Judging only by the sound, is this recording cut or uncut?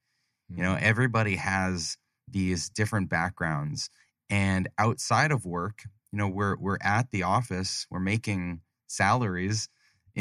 uncut